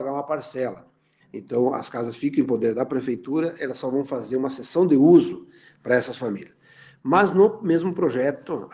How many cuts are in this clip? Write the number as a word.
one